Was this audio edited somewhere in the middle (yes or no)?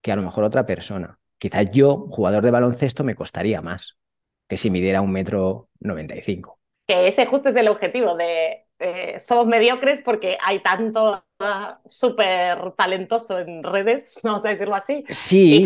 no